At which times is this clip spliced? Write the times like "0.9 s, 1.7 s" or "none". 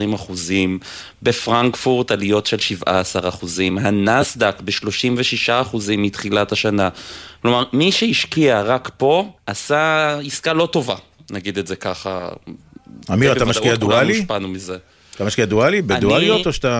9.4 s